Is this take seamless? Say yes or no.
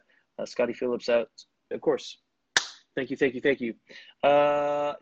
no